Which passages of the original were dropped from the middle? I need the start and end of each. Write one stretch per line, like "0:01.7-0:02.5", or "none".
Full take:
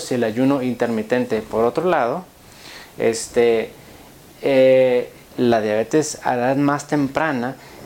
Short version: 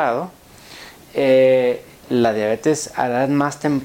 0:02.9-0:04.2